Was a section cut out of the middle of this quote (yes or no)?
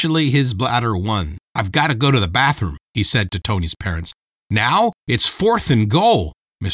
yes